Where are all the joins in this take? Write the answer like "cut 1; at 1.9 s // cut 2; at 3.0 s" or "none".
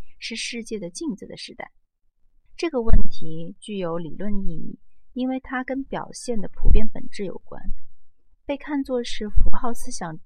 cut 1; at 2.5 s

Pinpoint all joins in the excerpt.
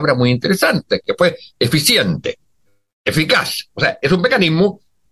none

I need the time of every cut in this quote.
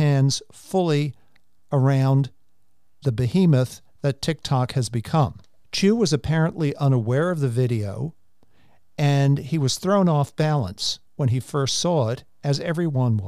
cut 1; at 5.6 s

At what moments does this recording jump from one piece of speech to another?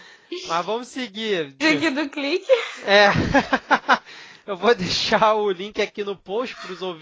cut 1; at 1.6 s

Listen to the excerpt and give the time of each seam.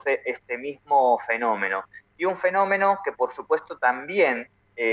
none

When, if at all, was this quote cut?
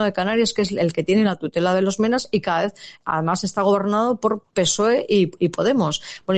none

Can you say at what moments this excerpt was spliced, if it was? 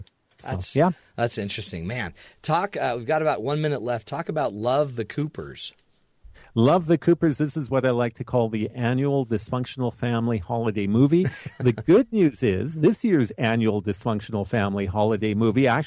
none

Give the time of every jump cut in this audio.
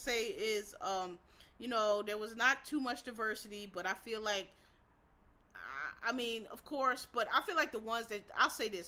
none

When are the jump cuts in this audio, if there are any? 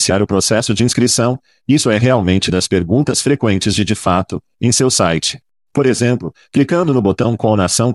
none

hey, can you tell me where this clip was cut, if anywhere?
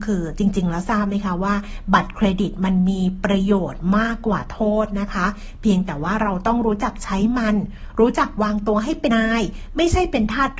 cut 1; at 9.1 s

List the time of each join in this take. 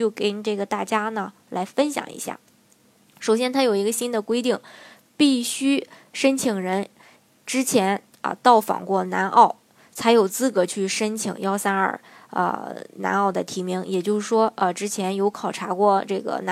none

